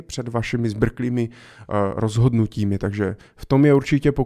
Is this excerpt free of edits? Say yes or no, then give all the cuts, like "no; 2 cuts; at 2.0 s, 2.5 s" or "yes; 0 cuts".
yes; 0 cuts